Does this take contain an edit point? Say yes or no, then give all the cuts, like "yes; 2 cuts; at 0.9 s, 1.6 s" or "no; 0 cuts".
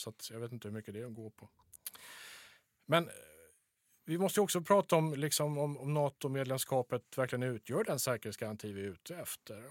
no; 0 cuts